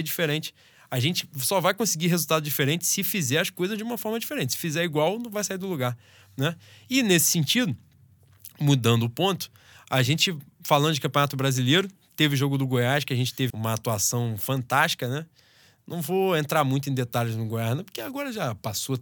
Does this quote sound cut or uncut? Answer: cut